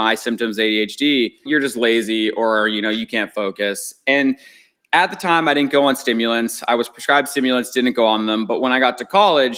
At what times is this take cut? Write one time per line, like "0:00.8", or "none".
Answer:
0:01.5